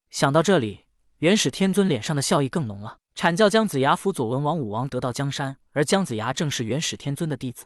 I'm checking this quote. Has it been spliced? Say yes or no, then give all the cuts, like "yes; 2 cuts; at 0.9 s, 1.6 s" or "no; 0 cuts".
yes; 1 cut; at 5.7 s